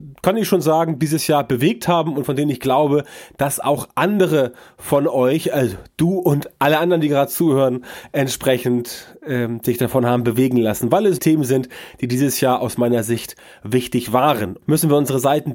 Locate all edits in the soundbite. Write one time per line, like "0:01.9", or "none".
0:11.2
0:14.6